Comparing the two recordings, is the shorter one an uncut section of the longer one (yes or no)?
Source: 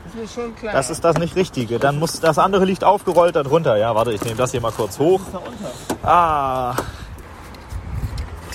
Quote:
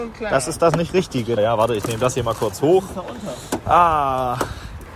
no